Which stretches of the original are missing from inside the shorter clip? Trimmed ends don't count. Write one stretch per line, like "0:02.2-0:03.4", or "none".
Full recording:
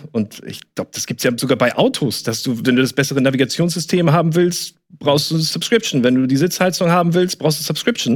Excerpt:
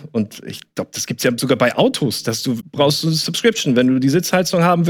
0:02.6-0:04.9